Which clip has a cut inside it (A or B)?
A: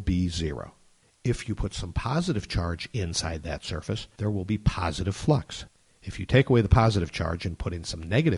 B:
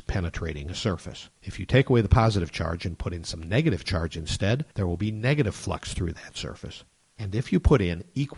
B